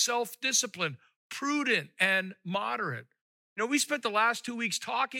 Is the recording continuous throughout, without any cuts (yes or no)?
no